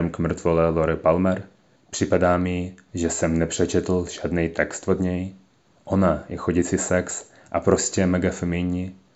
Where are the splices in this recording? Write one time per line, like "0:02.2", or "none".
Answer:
0:01.8
0:05.7